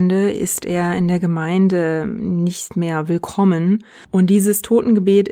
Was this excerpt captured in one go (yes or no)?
no